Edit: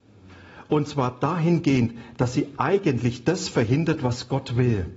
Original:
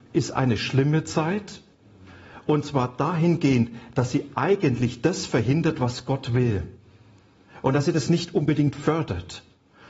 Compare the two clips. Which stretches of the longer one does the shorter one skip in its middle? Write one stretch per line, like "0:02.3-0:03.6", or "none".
none